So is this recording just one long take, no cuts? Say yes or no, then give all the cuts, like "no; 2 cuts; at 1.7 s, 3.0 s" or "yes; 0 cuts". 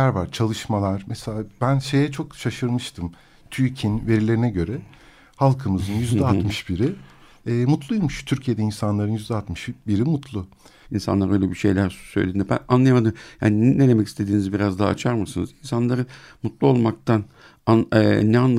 no; 1 cut; at 10.8 s